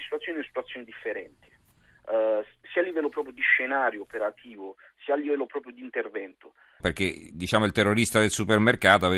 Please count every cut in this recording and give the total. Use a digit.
2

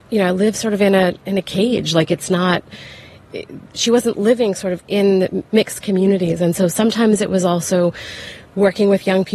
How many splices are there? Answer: 1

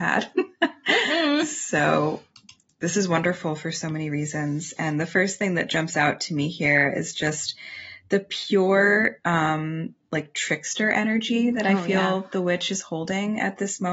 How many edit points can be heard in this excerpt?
0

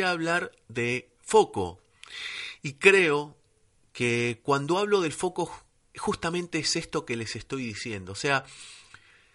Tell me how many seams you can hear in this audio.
0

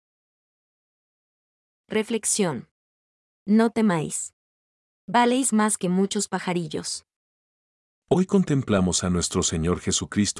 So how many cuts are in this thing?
0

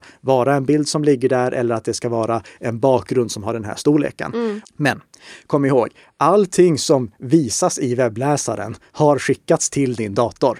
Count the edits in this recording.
1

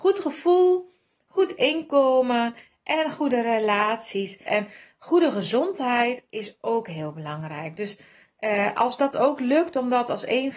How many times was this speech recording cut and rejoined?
1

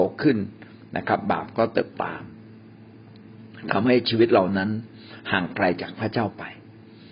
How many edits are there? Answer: 1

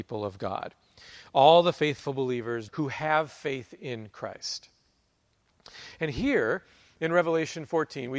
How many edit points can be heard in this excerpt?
1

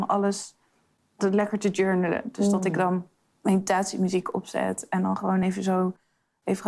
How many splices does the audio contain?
0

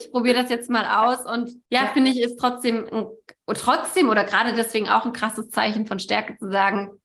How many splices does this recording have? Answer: 1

